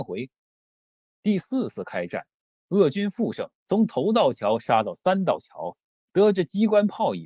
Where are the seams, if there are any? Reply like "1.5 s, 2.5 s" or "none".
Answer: 3.6 s